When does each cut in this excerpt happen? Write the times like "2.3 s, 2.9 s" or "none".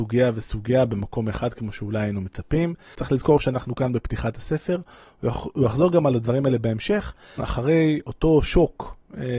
2.9 s, 7.4 s

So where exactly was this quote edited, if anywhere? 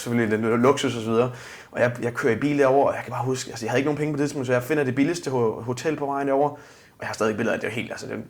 none

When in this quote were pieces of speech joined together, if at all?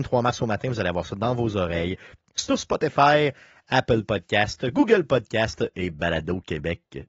none

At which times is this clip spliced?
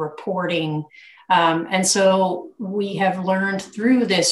1.2 s

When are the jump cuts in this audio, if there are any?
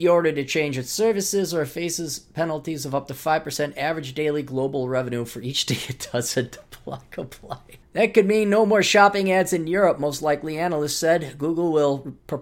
7.8 s

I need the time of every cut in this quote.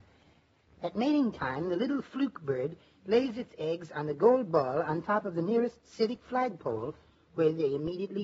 none

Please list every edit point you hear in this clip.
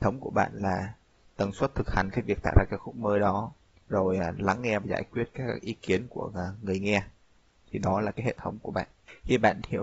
3.8 s

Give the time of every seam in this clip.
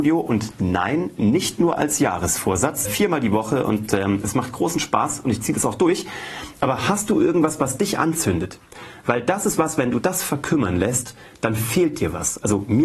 2.9 s

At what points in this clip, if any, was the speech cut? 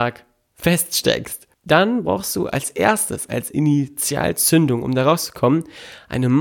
1.5 s

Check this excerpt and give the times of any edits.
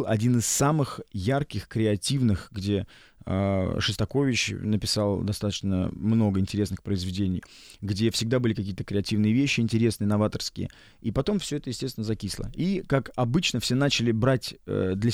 none

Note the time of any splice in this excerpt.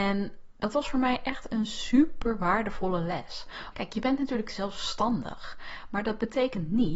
3.7 s

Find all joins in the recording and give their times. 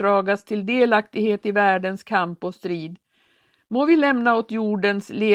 none

